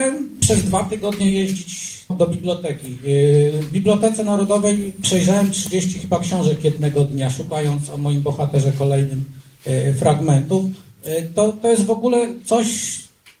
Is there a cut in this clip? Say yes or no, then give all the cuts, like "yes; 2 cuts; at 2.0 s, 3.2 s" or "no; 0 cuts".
yes; 1 cut; at 2.1 s